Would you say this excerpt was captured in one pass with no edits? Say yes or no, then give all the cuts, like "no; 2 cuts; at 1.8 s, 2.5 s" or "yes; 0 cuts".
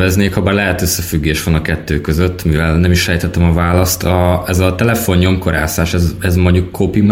yes; 0 cuts